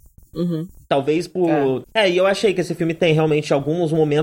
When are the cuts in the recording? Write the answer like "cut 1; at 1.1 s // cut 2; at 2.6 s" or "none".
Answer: cut 1; at 1.8 s